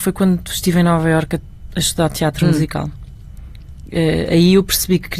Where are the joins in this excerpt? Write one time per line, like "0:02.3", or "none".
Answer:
none